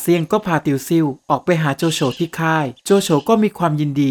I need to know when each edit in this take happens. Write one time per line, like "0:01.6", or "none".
0:02.8